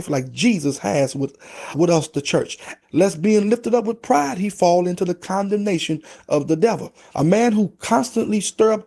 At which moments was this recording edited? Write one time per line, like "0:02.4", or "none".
0:02.8
0:07.1